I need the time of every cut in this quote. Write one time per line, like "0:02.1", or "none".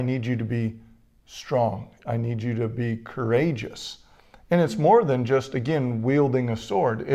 none